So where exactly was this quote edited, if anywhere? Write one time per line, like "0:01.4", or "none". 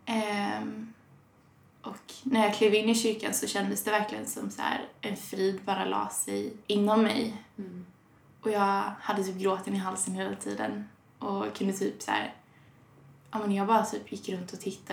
0:06.6